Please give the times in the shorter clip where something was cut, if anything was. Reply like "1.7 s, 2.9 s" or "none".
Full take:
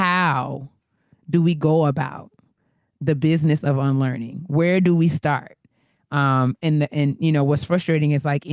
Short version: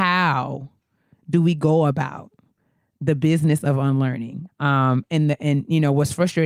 4.5 s